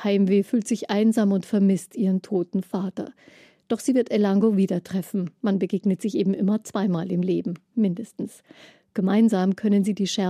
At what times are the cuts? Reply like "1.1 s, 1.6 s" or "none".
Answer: 5.4 s